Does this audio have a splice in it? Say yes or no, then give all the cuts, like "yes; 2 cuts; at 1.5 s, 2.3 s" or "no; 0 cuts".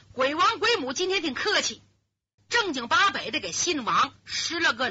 yes; 1 cut; at 2.4 s